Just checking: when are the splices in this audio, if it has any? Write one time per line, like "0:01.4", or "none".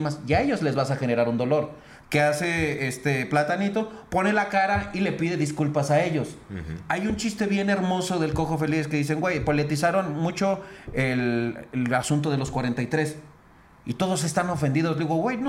none